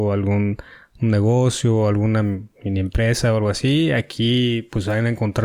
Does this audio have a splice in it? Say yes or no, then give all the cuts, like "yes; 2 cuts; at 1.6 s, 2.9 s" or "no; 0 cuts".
no; 0 cuts